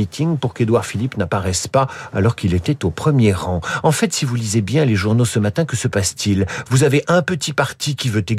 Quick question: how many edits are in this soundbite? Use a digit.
0